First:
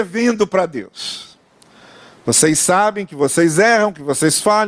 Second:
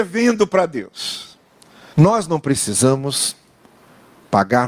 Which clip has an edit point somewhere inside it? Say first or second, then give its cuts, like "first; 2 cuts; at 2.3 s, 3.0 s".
second; 1 cut; at 1.9 s